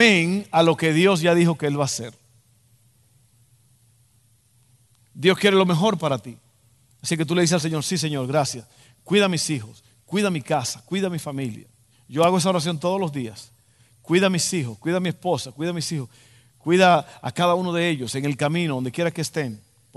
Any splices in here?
no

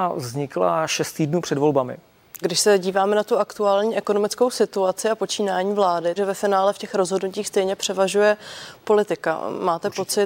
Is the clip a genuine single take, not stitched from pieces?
no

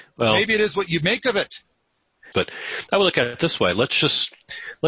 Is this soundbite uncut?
no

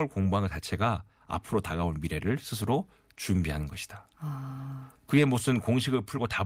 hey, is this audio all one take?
yes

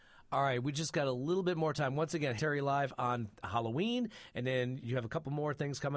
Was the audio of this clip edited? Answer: yes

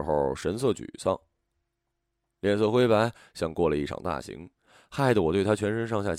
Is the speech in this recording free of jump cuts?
yes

